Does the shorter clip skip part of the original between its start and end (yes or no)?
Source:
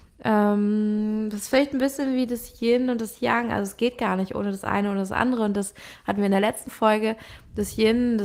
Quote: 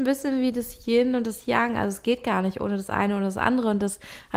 no